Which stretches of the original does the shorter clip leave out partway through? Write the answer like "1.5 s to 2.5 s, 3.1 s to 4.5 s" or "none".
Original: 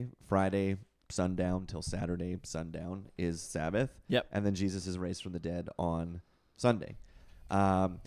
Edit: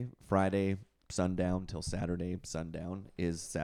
none